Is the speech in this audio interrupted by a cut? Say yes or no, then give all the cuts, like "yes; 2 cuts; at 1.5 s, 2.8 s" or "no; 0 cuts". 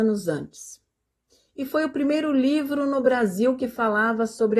no; 0 cuts